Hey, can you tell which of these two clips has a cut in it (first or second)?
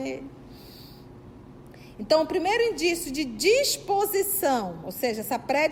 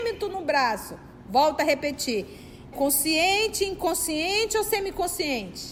second